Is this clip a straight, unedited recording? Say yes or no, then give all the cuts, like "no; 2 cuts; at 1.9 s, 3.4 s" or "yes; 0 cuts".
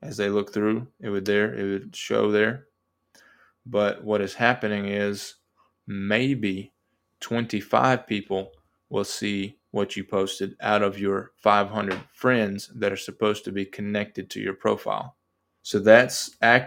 no; 1 cut; at 15.6 s